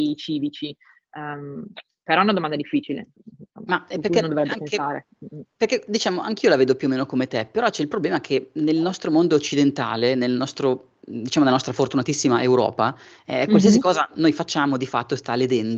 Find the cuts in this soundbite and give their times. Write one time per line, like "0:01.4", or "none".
none